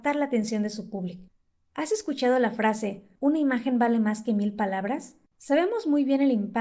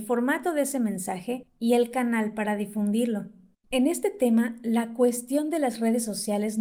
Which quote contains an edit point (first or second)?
first